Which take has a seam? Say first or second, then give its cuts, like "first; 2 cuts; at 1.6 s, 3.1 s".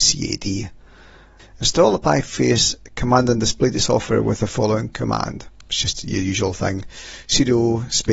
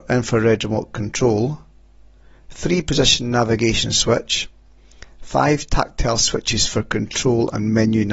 first; 1 cut; at 1.4 s